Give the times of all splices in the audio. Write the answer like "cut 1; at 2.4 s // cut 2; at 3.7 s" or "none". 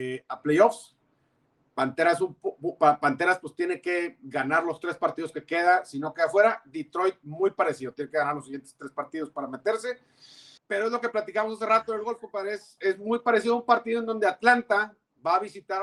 cut 1; at 10.6 s // cut 2; at 12.8 s